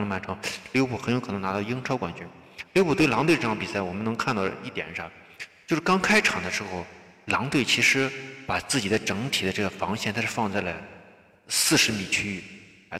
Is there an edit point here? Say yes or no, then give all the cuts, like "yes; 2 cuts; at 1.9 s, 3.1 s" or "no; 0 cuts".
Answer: no; 0 cuts